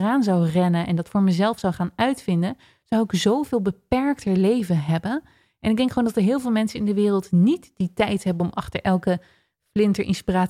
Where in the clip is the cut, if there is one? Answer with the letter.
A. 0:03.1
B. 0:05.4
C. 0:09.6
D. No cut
D